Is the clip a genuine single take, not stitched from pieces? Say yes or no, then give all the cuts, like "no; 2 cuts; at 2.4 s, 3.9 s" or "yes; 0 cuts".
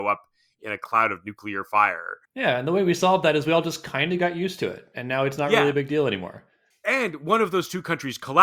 no; 1 cut; at 2.2 s